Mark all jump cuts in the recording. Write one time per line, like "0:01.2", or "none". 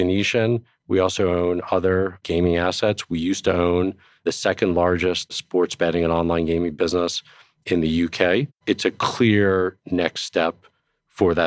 0:08.6